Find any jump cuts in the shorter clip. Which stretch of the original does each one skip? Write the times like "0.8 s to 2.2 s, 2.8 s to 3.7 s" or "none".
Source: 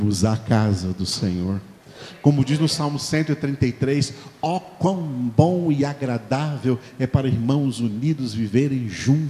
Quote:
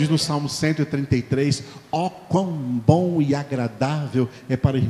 none

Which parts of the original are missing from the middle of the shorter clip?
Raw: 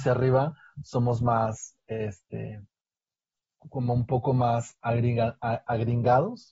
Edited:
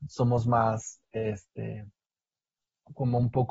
none

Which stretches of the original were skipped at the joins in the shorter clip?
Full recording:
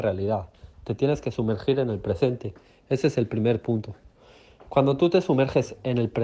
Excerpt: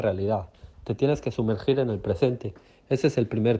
none

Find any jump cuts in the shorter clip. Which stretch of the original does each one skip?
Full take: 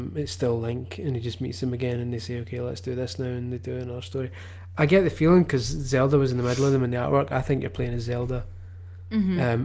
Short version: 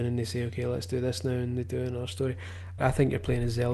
4.7 s to 7.3 s

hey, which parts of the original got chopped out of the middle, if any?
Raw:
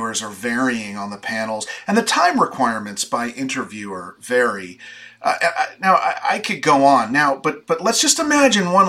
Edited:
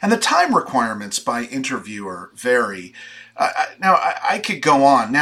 5.4 s to 5.5 s

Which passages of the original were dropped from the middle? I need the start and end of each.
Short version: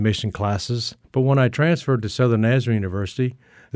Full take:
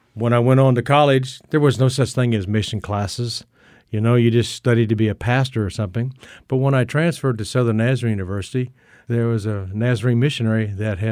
3.5 s to 6.4 s

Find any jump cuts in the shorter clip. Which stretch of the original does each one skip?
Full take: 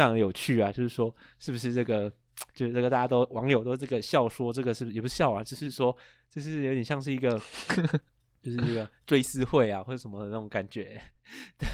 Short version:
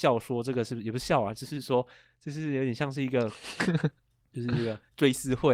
none

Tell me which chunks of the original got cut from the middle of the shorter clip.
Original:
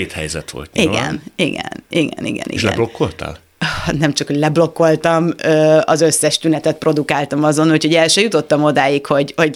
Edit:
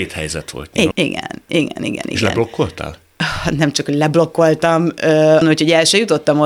0.9 s to 1.3 s, 5.8 s to 7.6 s

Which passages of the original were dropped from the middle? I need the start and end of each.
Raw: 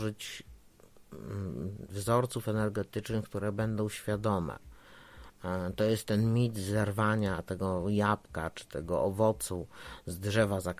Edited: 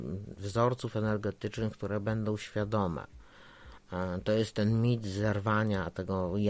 none

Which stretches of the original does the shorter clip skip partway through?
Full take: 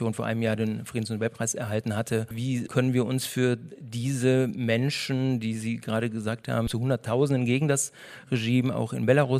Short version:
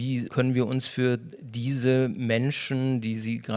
none

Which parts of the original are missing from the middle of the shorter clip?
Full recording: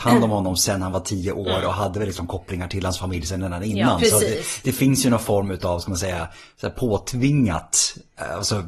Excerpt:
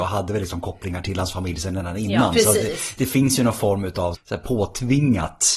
5.8 s to 6.5 s

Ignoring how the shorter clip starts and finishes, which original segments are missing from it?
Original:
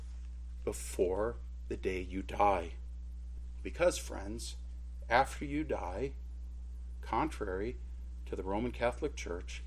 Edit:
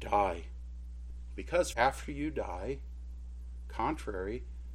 4.0 s to 5.1 s

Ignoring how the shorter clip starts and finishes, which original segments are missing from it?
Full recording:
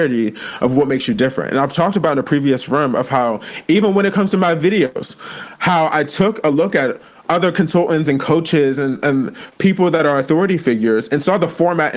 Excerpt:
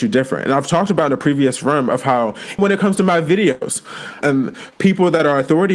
3.6 s to 3.9 s, 5.5 s to 9.0 s

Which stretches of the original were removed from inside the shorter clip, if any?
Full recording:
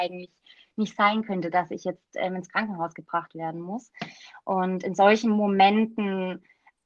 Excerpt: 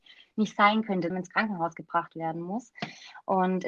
1.5 s to 2.3 s

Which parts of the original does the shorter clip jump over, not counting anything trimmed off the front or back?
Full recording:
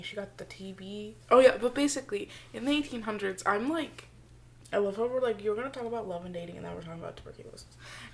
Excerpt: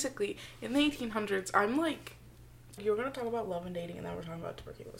4.7 s to 5.4 s

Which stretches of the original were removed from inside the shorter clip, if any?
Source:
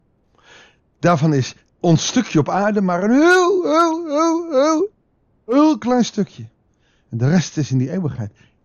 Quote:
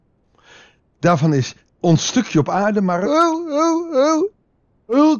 3.0 s to 3.6 s

